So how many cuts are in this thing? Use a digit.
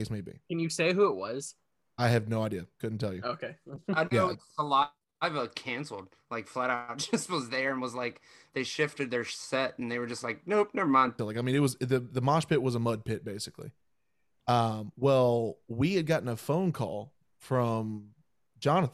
1